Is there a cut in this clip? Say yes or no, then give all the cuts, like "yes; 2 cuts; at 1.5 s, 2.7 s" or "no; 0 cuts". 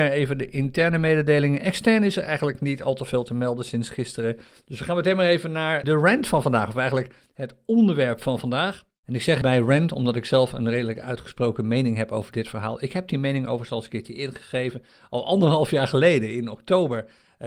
yes; 2 cuts; at 5.8 s, 9.4 s